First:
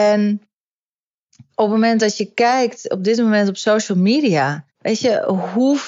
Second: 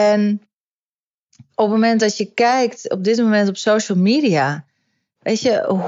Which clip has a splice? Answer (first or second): first